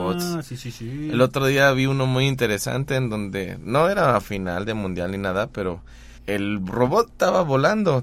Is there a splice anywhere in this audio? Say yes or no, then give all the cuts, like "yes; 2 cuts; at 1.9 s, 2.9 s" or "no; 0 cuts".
yes; 1 cut; at 6.2 s